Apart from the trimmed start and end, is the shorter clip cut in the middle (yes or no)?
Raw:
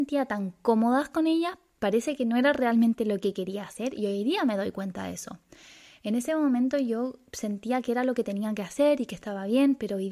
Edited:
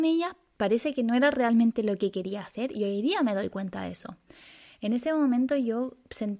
no